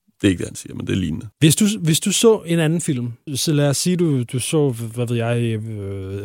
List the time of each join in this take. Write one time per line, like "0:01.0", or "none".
0:01.3
0:03.3